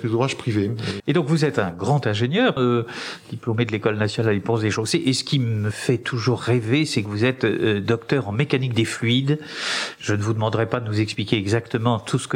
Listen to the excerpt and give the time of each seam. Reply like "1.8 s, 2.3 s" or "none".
1.0 s, 2.6 s